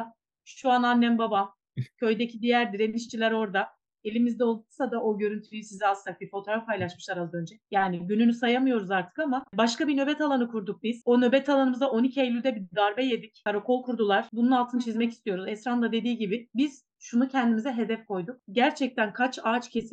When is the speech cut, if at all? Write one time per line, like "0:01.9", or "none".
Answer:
0:07.7
0:14.3